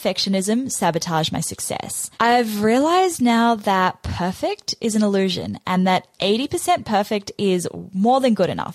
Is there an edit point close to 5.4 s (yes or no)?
no